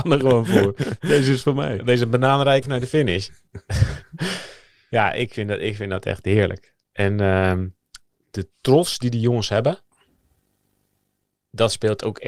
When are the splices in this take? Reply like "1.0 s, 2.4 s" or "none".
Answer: 2.6 s